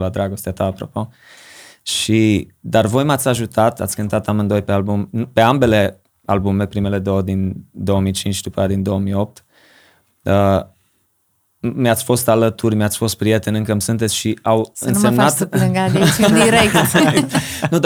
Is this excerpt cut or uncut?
uncut